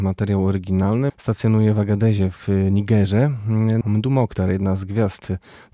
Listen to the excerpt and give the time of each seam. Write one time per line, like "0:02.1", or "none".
0:01.1
0:03.8